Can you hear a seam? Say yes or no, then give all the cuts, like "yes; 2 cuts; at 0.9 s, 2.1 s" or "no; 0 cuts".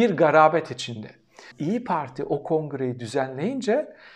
yes; 1 cut; at 1.5 s